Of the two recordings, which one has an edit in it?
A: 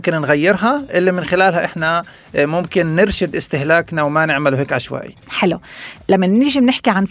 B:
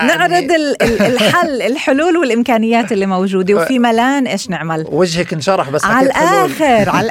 A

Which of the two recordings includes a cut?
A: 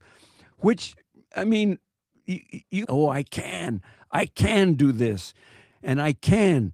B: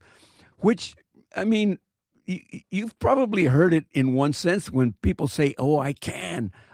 A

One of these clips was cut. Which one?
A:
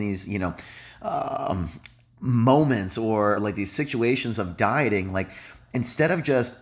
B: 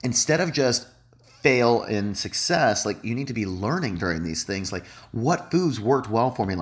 A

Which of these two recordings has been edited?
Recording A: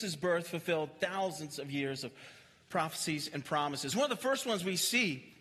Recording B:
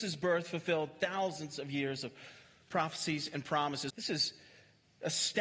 B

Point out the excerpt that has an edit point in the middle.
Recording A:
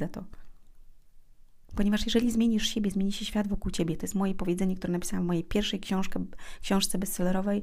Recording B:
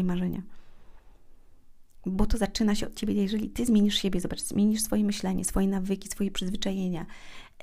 A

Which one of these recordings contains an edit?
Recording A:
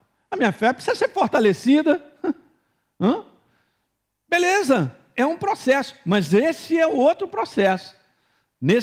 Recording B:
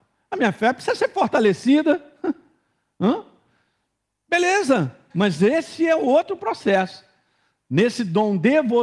B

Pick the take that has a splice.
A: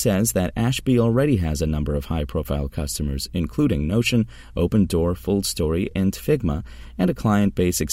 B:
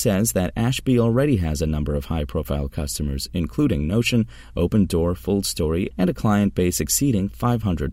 B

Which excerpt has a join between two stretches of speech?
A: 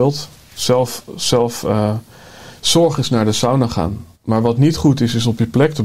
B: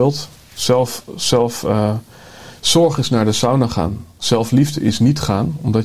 A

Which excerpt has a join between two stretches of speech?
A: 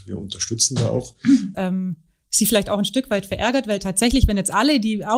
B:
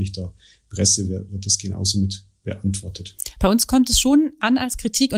A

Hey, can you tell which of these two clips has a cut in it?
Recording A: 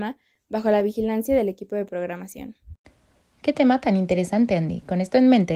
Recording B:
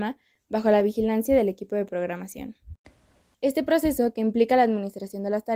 B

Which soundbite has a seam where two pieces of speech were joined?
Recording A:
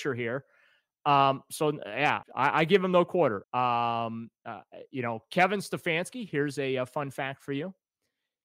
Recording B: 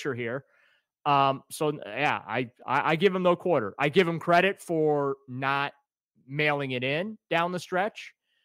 A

